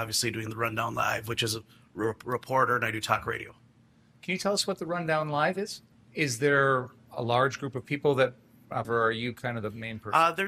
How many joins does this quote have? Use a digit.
2